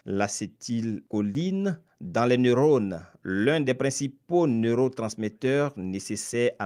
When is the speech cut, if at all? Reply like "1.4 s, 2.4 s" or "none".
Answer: none

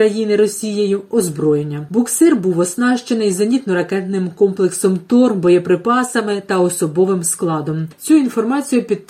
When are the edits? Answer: none

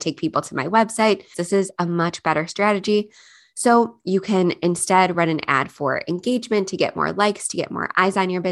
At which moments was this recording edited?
1.3 s

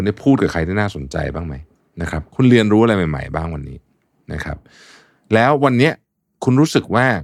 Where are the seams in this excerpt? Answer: none

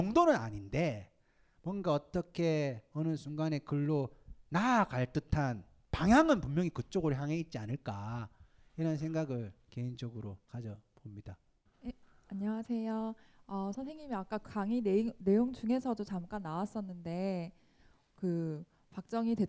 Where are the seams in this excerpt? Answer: none

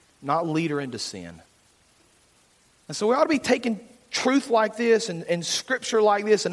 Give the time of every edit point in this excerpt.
none

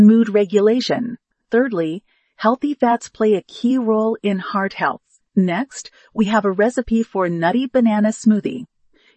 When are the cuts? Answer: 5.2 s

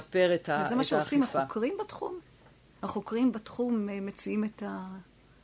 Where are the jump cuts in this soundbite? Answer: none

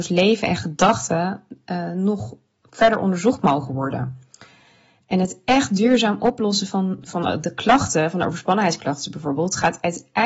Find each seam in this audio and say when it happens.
none

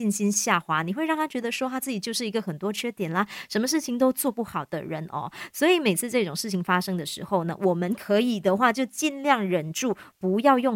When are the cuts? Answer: none

